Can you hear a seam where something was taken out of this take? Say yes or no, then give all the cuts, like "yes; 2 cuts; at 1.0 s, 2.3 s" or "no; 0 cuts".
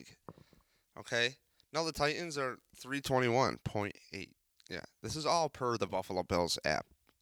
no; 0 cuts